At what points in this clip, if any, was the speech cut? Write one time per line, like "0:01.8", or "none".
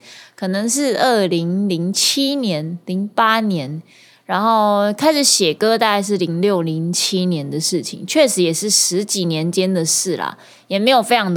none